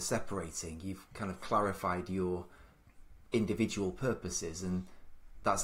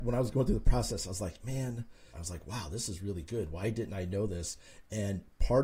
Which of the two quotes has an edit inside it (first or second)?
second